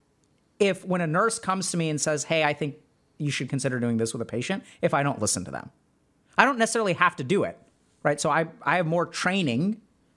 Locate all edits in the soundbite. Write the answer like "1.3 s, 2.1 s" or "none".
none